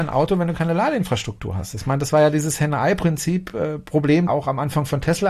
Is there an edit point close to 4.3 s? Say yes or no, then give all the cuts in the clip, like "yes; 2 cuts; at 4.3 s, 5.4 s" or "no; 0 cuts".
yes; 1 cut; at 4.3 s